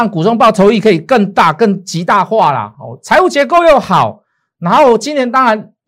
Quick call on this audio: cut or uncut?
uncut